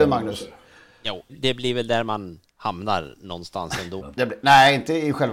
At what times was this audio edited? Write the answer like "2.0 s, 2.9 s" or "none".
1.3 s, 4.0 s